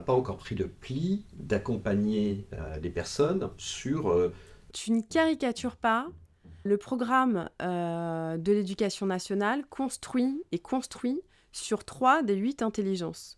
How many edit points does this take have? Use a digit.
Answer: 2